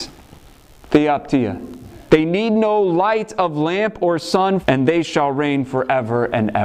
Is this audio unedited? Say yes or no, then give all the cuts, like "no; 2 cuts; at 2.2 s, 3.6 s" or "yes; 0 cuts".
no; 2 cuts; at 2.1 s, 4.6 s